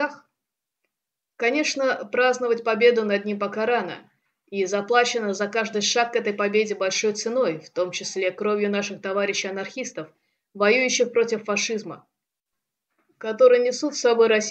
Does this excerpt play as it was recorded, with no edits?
yes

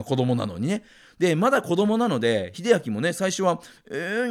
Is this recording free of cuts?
yes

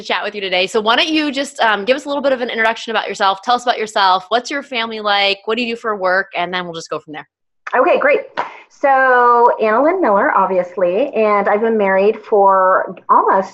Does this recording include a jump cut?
no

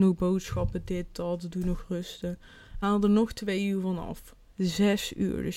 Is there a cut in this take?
no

